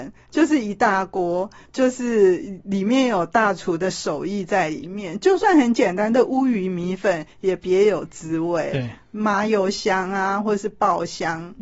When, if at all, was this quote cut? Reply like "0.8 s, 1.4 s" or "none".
none